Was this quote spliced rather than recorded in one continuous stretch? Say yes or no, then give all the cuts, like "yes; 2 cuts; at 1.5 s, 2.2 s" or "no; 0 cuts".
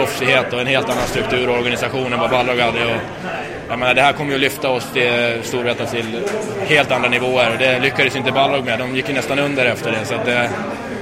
no; 0 cuts